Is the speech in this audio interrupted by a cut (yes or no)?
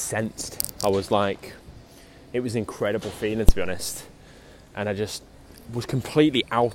no